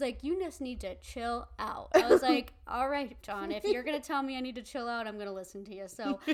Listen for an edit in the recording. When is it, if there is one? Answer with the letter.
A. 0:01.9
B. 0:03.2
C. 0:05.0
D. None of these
B